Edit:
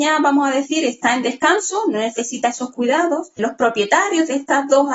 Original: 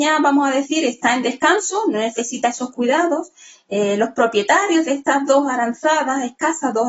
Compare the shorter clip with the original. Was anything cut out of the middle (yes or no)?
yes